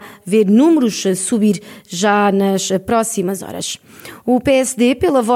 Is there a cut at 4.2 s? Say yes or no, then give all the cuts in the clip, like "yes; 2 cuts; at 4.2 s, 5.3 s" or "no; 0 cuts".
no; 0 cuts